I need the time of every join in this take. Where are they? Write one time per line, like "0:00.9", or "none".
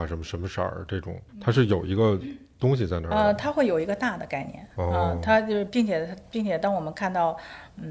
0:01.3